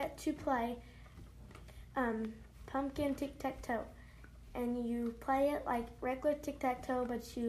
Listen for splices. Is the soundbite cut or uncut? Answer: uncut